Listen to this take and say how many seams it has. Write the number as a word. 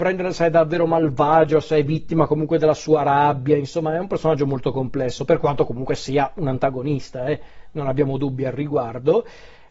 zero